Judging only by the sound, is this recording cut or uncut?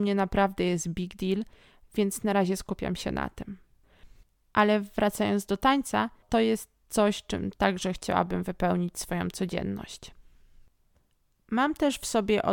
cut